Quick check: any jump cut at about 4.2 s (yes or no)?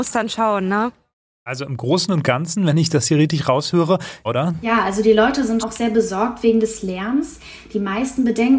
yes